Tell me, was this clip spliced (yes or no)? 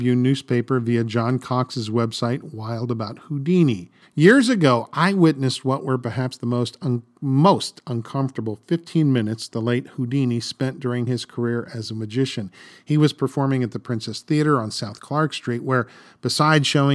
yes